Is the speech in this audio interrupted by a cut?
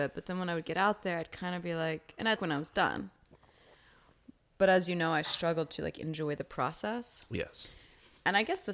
yes; 1 cut; at 2.4 s

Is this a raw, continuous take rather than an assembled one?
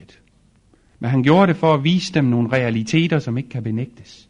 no; 1 cut; at 0.9 s

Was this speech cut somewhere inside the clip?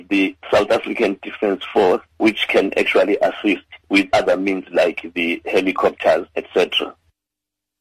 yes; 1 cut; at 4.1 s

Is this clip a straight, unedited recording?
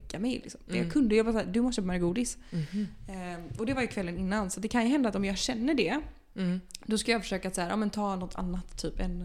yes; 0 cuts

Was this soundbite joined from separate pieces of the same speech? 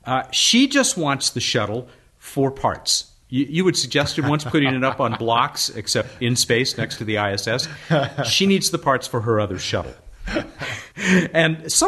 yes; 1 cut; at 10.9 s

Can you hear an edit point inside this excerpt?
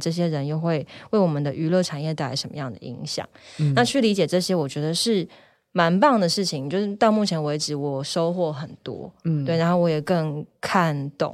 no; 0 cuts

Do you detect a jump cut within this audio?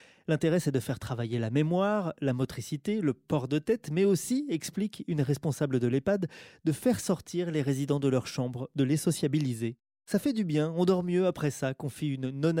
no; 0 cuts

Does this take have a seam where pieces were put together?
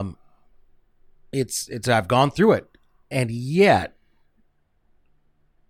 yes; 1 cut; at 1.7 s

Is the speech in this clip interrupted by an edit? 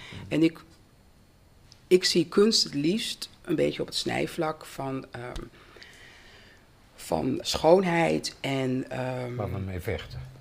yes; 1 cut; at 7.4 s

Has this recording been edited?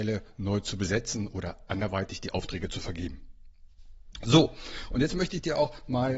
no; 0 cuts

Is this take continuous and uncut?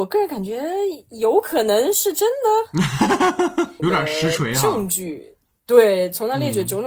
no; 1 cut; at 3.8 s

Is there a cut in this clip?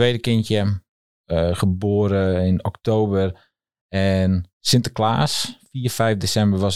no; 0 cuts

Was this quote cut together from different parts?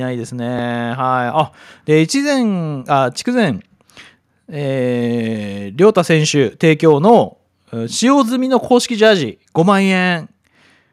no; 0 cuts

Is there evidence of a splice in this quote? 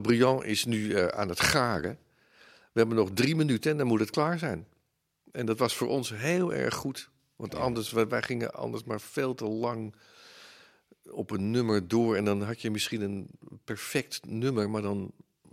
no; 0 cuts

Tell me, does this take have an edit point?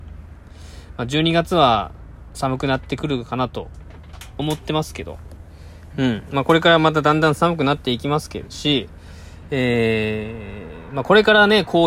no; 0 cuts

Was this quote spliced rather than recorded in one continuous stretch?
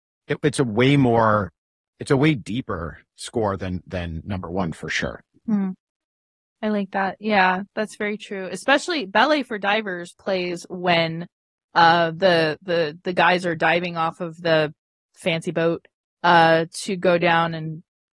no; 0 cuts

